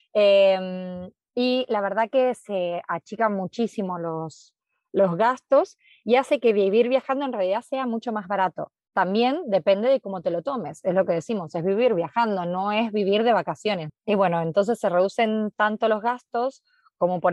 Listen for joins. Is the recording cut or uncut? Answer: cut